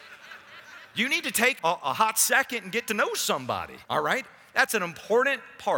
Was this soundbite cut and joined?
yes; 2 cuts; at 1.6 s, 3.9 s

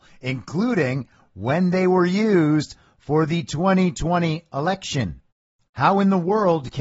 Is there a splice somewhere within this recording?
no; 0 cuts

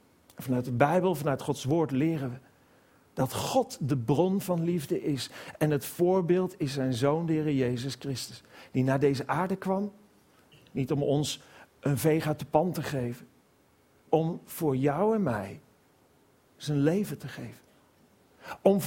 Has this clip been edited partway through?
yes; 1 cut; at 14.1 s

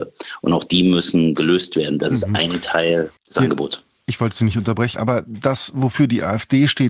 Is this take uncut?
no; 2 cuts; at 3.2 s, 5.0 s

